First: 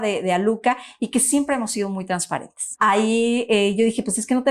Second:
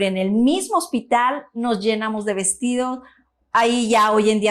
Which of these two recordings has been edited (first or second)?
first